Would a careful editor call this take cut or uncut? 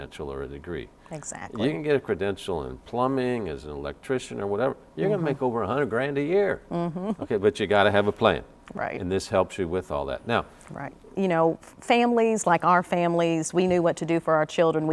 cut